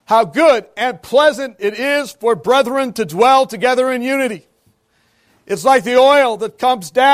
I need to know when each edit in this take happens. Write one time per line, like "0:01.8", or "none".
none